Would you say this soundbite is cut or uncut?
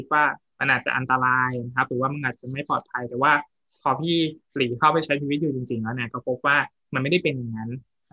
uncut